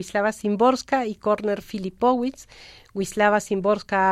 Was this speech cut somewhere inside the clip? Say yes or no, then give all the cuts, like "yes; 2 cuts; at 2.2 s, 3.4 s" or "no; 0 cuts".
no; 0 cuts